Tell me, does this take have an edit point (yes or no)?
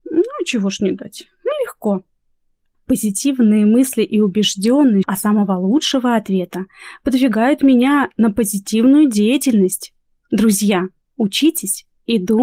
yes